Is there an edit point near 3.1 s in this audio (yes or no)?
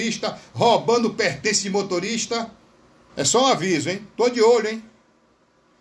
yes